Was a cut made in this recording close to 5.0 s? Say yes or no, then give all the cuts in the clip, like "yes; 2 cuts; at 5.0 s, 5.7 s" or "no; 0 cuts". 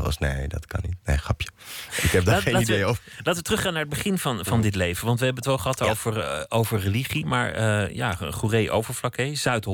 no; 0 cuts